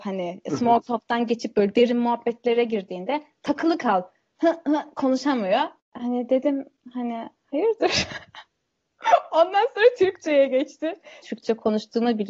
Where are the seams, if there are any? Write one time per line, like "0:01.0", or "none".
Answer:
0:05.8
0:11.2